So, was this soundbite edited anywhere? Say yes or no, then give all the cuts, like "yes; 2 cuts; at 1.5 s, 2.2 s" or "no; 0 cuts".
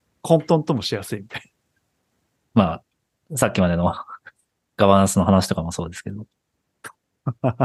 no; 0 cuts